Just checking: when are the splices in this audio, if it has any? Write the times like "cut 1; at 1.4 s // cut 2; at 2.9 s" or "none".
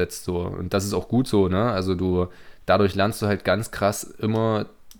none